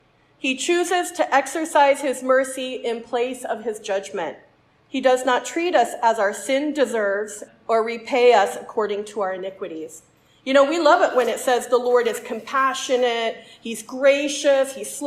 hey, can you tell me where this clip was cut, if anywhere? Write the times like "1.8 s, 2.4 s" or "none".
4.9 s, 7.5 s